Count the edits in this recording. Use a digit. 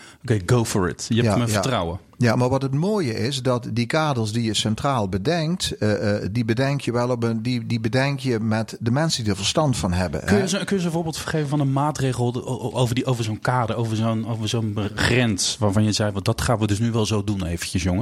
0